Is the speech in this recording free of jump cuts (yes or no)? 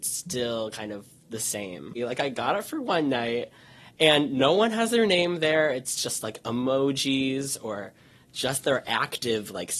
no